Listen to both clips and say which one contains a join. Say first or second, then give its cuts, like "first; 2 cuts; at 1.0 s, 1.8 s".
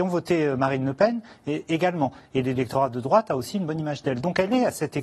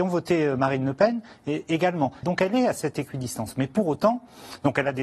second; 1 cut; at 2.2 s